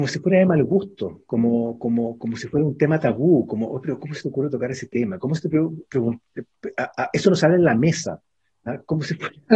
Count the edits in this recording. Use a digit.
0